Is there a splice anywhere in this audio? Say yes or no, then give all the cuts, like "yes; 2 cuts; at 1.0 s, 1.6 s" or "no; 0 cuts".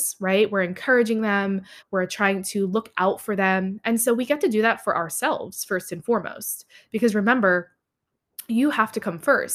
yes; 1 cut; at 1.8 s